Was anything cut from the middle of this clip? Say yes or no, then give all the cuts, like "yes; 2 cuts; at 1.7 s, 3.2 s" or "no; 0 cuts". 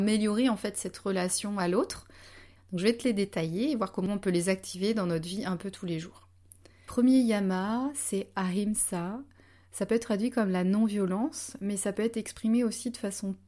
yes; 1 cut; at 2.6 s